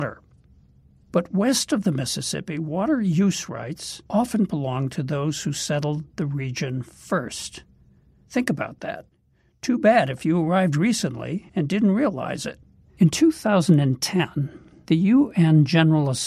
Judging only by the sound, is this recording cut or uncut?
cut